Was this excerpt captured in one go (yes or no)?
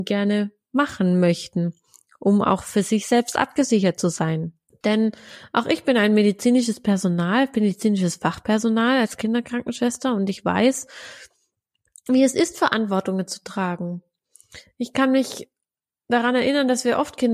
no